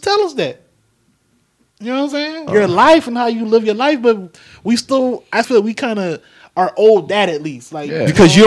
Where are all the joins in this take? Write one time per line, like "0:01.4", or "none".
0:02.5
0:05.4

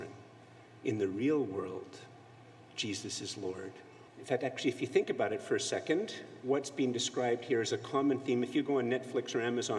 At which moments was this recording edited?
0:04.1

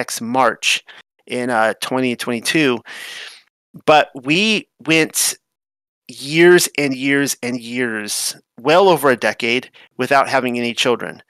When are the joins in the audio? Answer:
none

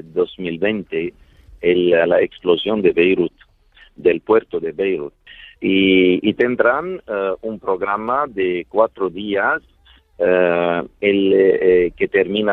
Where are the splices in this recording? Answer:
0:05.6

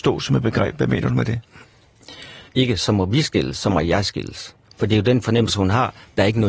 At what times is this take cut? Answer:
0:02.5

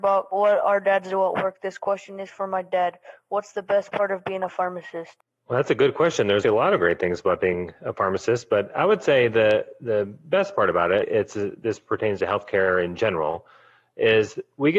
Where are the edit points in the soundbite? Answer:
0:06.4
0:11.0

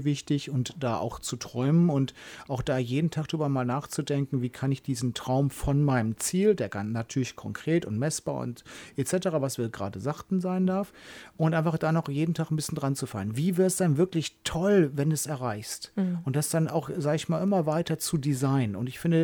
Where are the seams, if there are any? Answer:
none

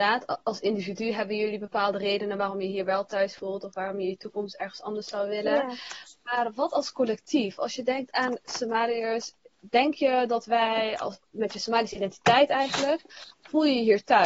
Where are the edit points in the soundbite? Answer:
none

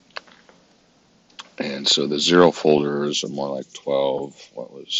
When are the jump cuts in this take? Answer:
none

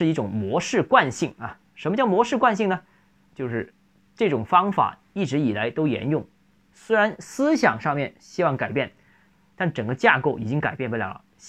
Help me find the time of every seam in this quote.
0:06.6

